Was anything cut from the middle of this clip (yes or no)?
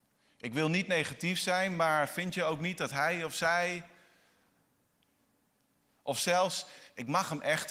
no